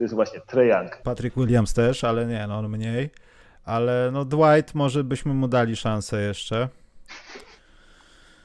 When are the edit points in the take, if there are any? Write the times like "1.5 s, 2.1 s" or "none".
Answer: 1.0 s